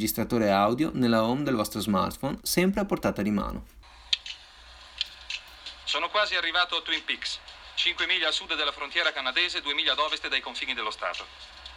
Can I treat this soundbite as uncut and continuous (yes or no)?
no